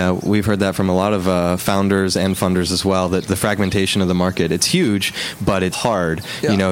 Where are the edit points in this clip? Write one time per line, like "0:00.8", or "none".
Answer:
0:05.7